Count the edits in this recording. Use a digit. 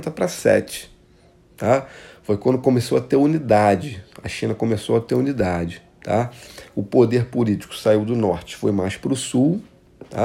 0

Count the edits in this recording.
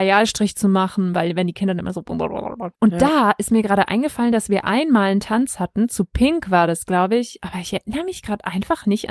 1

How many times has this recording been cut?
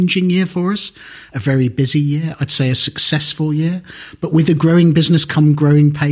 0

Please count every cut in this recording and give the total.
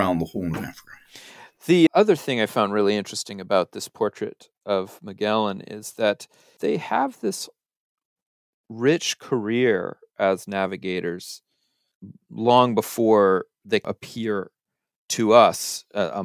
2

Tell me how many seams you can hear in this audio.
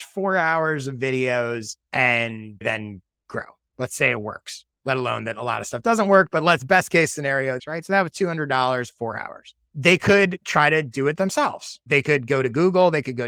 1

